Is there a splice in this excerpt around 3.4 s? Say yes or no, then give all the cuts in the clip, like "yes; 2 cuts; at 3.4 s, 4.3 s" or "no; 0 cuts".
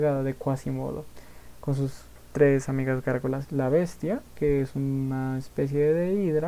yes; 1 cut; at 3.4 s